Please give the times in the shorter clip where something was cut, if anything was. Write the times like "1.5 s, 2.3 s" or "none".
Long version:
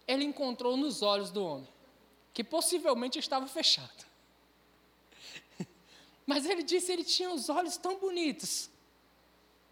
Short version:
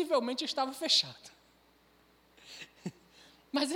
none